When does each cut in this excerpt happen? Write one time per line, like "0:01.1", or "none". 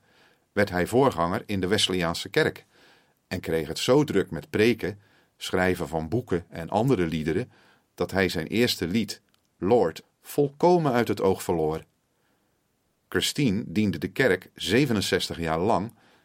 0:10.0

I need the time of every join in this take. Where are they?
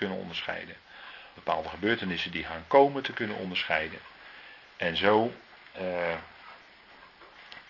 0:01.4

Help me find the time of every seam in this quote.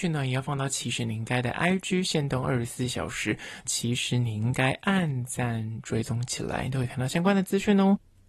0:03.6

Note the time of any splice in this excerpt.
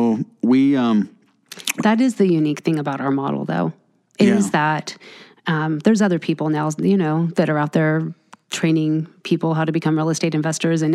none

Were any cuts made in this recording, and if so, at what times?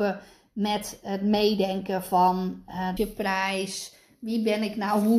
0:03.0

